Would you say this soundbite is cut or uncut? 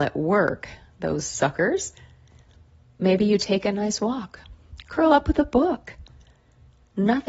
uncut